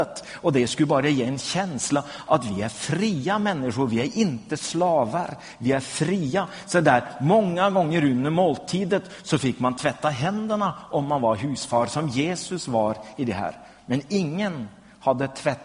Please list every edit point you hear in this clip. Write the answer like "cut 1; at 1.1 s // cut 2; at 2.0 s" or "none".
none